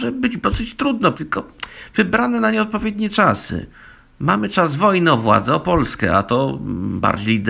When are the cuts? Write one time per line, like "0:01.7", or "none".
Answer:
0:01.1